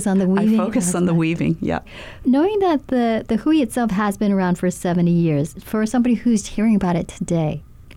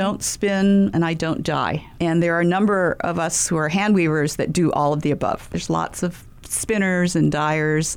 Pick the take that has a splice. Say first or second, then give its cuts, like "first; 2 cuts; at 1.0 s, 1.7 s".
first; 1 cut; at 6.4 s